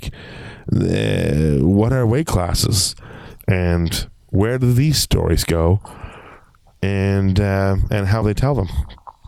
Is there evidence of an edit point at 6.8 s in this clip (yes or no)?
no